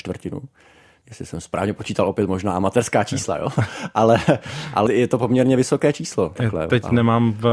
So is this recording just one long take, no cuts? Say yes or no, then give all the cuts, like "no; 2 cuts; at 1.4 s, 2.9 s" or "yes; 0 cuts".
no; 1 cut; at 4.9 s